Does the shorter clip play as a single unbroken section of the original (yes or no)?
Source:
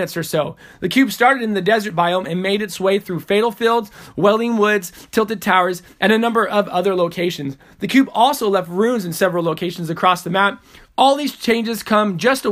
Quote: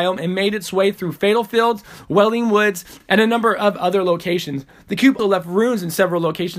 no